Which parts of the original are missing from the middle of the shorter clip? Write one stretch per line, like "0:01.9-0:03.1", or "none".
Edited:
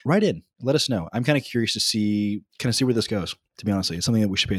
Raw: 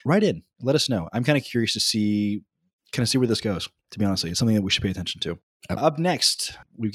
0:02.5-0:02.8